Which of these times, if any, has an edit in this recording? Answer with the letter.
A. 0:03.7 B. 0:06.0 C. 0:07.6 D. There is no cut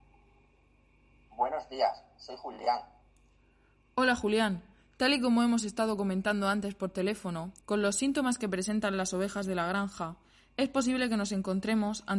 C